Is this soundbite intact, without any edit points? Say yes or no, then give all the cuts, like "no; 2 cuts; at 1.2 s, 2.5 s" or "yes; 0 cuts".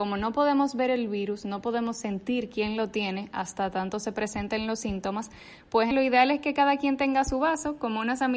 no; 1 cut; at 5.9 s